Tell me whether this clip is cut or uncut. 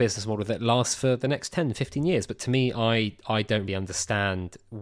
cut